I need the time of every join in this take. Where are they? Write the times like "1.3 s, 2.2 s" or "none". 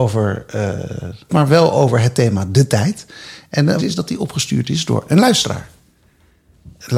1.3 s, 3.8 s